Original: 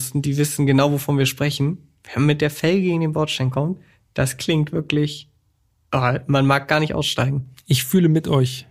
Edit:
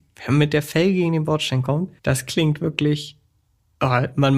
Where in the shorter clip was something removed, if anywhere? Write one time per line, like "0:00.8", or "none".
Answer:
0:02.0